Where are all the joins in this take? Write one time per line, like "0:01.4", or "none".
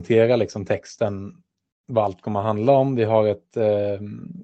none